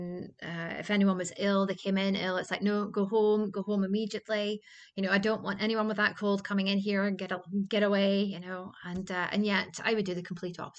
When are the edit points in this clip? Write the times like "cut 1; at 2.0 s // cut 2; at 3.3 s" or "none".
none